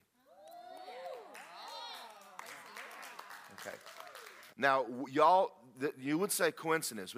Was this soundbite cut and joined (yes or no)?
yes